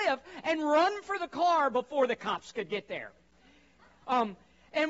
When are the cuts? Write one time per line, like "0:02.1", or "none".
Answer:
0:04.0